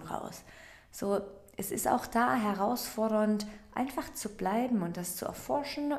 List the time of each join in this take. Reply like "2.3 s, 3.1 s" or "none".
none